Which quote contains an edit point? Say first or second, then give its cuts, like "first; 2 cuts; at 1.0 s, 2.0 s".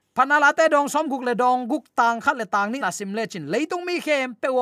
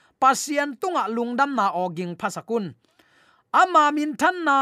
first; 1 cut; at 2.8 s